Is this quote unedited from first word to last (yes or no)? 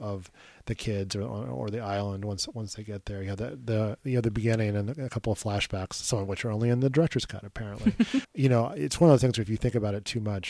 no